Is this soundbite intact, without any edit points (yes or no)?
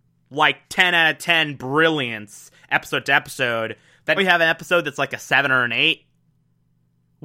no